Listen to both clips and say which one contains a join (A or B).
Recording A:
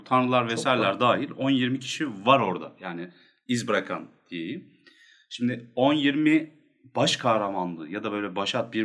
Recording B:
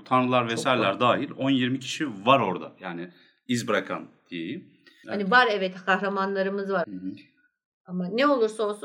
B